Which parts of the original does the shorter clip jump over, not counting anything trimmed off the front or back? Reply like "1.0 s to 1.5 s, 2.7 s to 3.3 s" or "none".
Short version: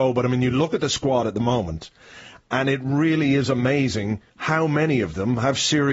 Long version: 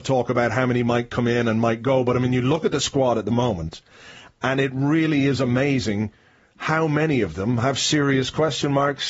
6.2 s to 6.5 s